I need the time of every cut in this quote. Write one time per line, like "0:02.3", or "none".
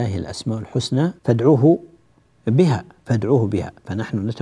0:01.2